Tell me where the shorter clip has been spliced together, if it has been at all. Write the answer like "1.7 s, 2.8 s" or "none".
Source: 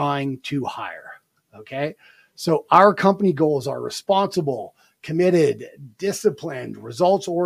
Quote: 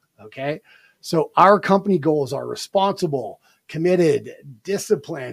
none